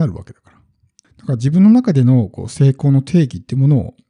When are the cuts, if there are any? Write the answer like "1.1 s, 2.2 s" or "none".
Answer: 1.0 s